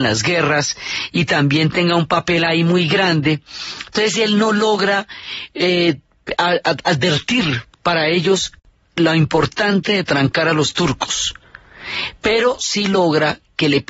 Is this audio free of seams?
yes; 0 cuts

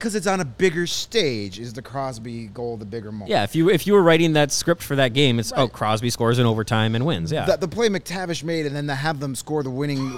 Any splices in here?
yes; 1 cut; at 3.3 s

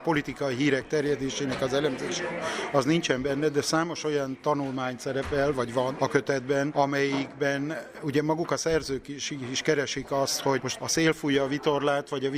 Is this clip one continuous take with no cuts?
yes; 0 cuts

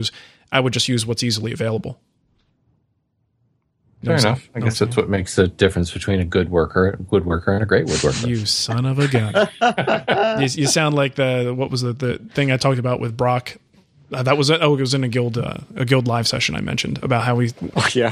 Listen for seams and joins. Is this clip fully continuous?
yes; 0 cuts

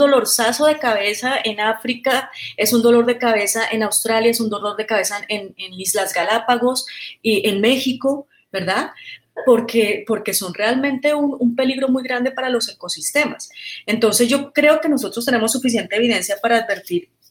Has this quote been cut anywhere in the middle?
no; 0 cuts

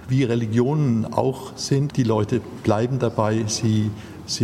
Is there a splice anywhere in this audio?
yes; 1 cut; at 1.9 s

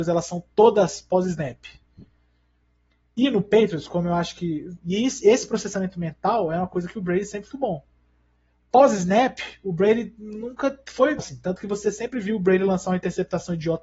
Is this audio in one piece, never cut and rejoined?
no; 3 cuts; at 4.8 s, 7.5 s, 11.2 s

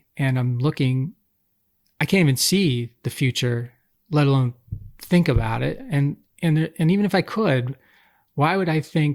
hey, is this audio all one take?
yes; 0 cuts

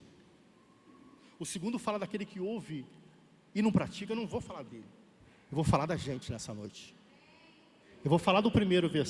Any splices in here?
no; 0 cuts

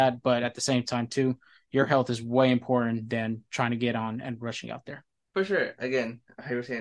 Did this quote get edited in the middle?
no; 0 cuts

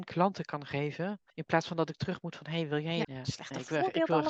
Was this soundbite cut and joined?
yes; 2 cuts; at 1.3 s, 3.0 s

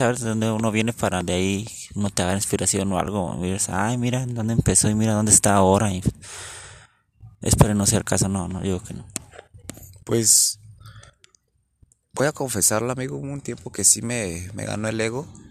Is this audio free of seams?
yes; 0 cuts

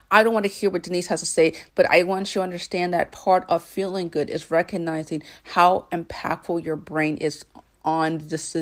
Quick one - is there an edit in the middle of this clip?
yes; 1 cut; at 1.7 s

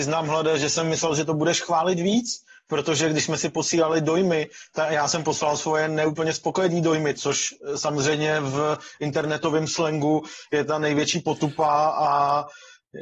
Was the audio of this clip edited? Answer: yes; 1 cut; at 7.1 s

